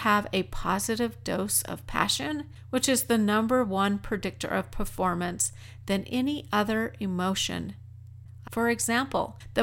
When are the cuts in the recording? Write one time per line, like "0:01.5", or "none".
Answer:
0:08.4